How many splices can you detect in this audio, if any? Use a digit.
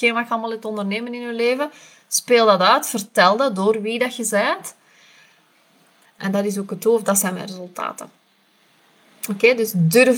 1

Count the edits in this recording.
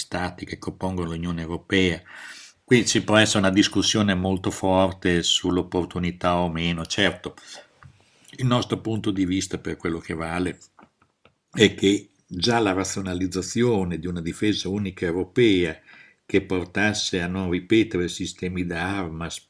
1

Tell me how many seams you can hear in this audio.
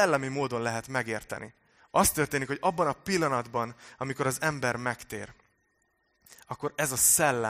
1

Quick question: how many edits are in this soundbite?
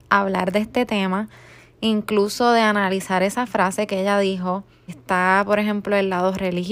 1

